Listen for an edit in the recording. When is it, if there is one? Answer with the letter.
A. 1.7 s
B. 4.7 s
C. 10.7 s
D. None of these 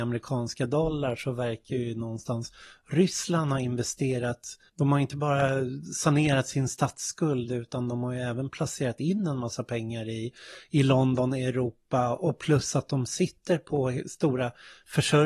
B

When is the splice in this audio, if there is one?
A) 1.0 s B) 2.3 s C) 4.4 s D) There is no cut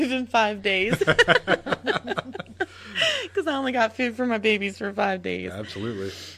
D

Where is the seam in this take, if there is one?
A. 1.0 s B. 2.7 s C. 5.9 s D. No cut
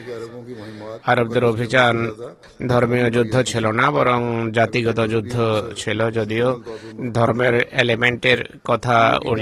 A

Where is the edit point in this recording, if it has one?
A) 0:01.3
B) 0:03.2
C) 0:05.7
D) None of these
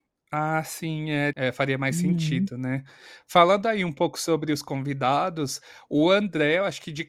A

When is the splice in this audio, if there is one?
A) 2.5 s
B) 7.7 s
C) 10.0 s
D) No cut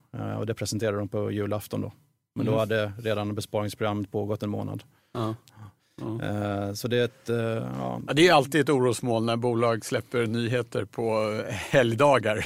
D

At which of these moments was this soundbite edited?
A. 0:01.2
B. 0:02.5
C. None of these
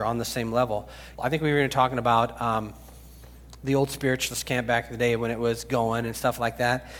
A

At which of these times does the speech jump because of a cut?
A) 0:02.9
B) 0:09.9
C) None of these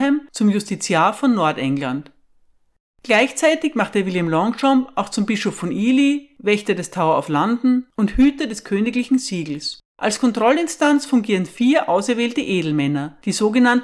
B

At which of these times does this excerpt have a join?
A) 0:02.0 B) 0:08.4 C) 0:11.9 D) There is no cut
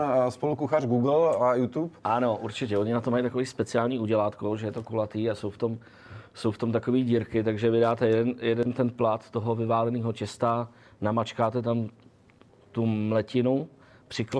D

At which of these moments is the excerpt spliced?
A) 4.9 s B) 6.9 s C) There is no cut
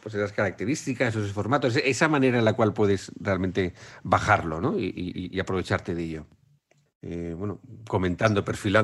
B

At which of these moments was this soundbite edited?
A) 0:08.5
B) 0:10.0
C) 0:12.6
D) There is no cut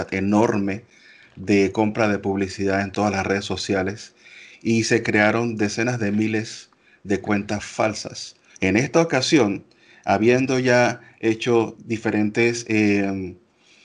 A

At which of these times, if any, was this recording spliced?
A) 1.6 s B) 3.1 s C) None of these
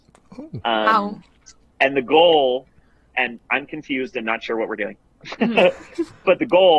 B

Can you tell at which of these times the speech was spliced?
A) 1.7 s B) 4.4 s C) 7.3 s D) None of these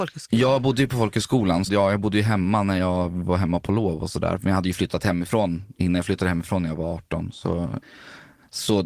A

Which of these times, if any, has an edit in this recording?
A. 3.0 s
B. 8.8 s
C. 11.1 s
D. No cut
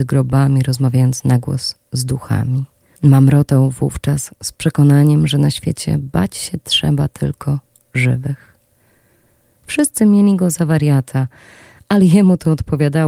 A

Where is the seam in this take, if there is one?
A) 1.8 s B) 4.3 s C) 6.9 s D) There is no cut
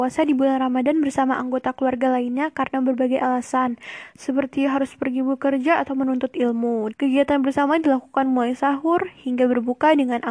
C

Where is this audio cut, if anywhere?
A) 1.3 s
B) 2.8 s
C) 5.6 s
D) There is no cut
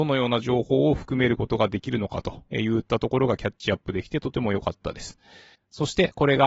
C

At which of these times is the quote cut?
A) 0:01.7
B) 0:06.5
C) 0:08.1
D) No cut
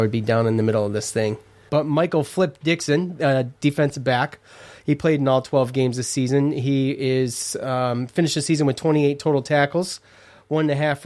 A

